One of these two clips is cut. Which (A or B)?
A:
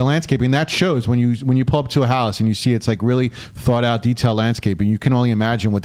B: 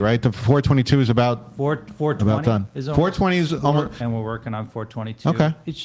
B